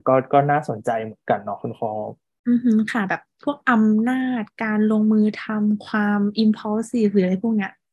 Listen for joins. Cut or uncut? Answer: uncut